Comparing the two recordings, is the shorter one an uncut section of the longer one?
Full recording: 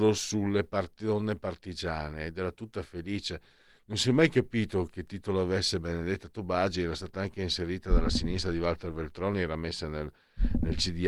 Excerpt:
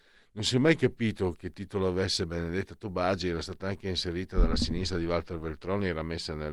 yes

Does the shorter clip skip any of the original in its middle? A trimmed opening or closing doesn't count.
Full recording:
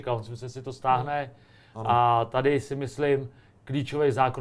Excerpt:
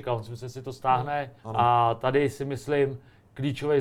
yes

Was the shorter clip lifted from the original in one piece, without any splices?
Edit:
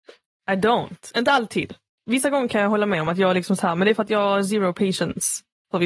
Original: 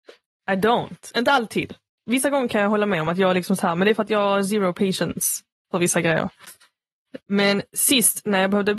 yes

